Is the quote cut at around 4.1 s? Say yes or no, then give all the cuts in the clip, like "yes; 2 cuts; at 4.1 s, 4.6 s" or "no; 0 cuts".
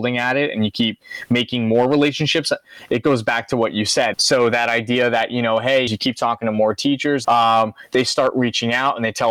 yes; 3 cuts; at 4.1 s, 5.9 s, 7.2 s